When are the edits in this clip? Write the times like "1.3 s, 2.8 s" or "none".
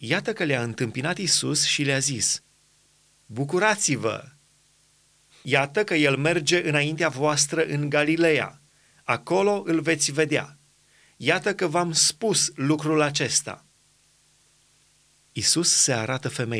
5.3 s